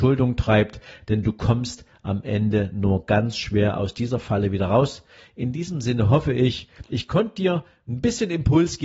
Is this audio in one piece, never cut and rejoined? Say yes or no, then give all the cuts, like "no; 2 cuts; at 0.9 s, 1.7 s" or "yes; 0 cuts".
no; 1 cut; at 6.9 s